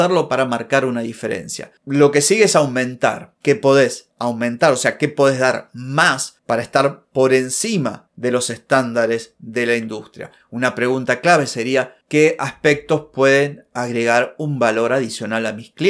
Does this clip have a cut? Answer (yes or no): no